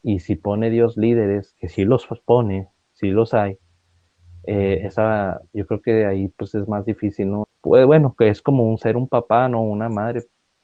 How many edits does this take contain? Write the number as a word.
one